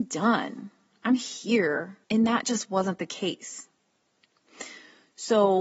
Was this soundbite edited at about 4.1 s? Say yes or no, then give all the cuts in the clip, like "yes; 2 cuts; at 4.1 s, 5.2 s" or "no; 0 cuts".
no; 1 cut; at 2.0 s